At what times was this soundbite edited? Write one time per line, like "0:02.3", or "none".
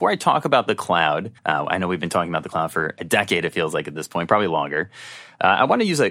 0:01.4